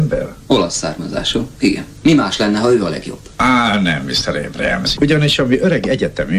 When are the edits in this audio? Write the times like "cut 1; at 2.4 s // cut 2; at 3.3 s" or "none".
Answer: cut 1; at 2.0 s // cut 2; at 5.0 s